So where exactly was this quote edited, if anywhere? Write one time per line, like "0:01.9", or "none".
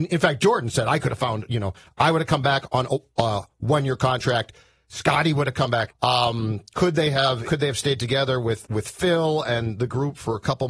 0:05.9
0:07.4